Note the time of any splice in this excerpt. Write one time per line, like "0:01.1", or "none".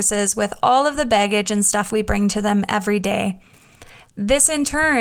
0:04.0